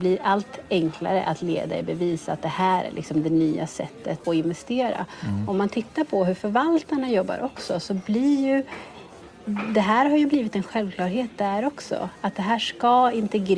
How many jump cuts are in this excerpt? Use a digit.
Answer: 1